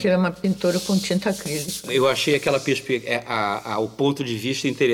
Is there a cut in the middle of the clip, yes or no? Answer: no